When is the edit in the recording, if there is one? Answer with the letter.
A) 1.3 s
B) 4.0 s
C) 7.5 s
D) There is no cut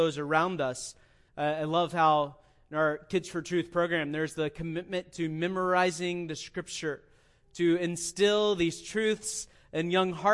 A